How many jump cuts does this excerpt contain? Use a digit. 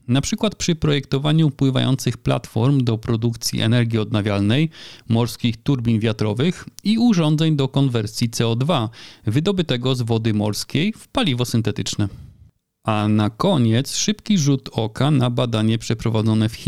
0